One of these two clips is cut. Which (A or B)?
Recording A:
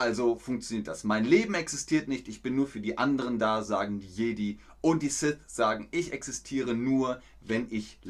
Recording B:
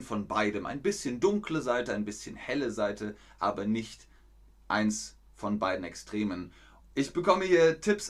B